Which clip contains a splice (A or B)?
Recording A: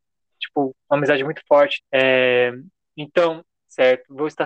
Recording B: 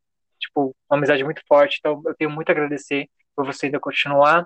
A